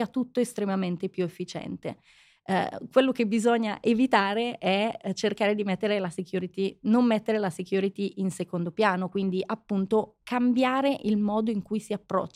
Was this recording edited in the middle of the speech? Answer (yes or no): no